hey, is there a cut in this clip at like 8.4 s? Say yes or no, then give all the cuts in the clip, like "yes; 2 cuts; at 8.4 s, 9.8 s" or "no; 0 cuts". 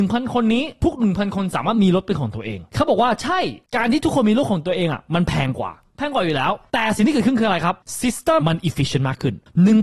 yes; 1 cut; at 8.4 s